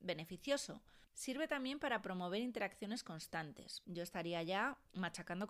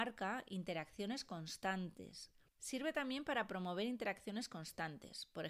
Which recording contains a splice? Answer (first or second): first